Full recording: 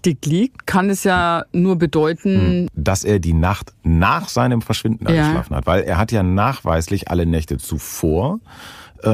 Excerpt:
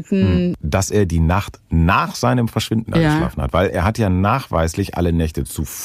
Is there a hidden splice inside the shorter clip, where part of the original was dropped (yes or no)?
no